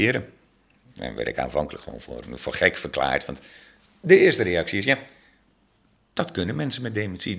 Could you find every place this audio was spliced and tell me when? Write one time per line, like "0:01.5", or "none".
0:02.3